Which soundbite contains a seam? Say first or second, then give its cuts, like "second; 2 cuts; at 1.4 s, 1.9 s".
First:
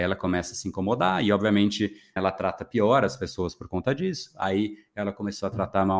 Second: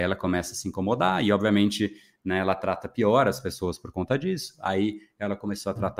first; 1 cut; at 2.2 s